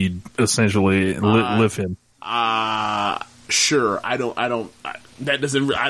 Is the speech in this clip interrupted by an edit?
no; 0 cuts

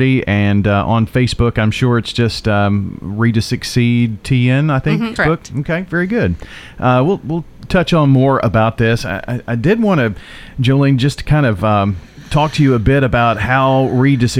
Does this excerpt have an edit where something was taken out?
yes; 1 cut; at 5.2 s

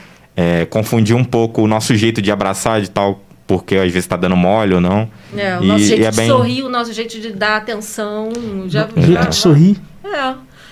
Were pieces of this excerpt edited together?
no; 0 cuts

